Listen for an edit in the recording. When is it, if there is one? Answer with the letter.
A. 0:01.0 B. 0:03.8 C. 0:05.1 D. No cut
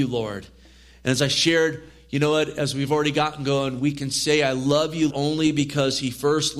C